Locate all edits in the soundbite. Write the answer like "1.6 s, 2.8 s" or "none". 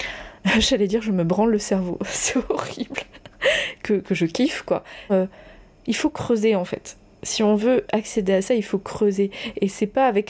5.1 s